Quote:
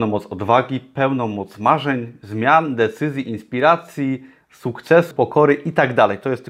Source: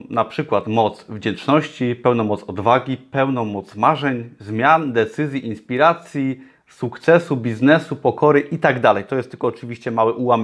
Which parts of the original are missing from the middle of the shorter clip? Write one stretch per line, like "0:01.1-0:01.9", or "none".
0:07.3-0:08.0